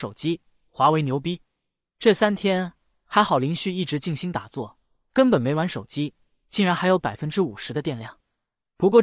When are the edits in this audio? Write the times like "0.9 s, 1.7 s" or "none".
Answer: none